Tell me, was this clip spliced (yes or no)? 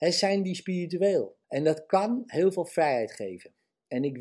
yes